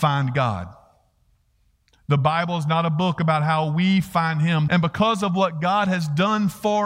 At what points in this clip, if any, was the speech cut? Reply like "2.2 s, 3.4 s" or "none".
4.7 s